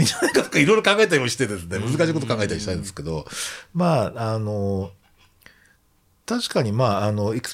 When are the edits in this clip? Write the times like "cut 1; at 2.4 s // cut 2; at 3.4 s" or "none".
none

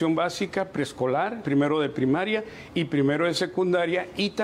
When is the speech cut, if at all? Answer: cut 1; at 1.4 s

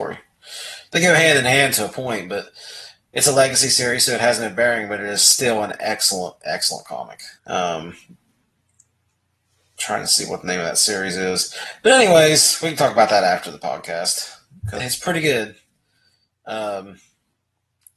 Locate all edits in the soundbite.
cut 1; at 7.4 s // cut 2; at 14.8 s

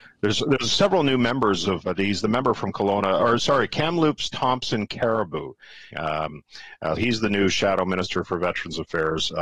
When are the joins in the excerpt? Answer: cut 1; at 1.8 s // cut 2; at 5.9 s // cut 3; at 7.0 s

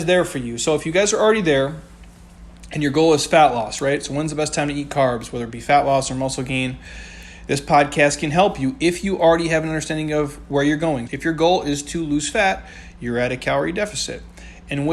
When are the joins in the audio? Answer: cut 1; at 11.1 s

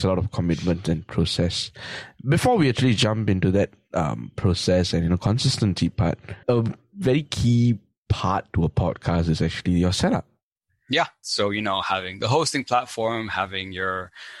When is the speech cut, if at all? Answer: cut 1; at 6.4 s // cut 2; at 11.2 s

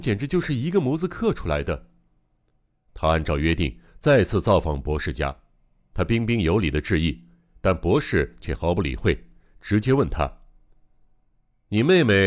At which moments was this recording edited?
cut 1; at 2.9 s // cut 2; at 5.9 s

